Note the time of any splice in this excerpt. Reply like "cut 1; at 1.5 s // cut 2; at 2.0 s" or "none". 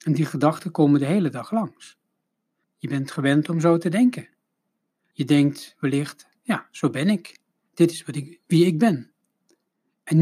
cut 1; at 2.6 s // cut 2; at 5.1 s

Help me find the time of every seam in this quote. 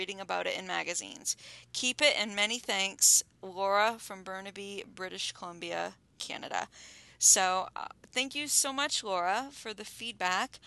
none

